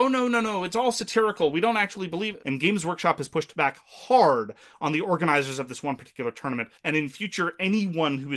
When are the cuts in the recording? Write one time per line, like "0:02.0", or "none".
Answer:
0:02.4
0:06.8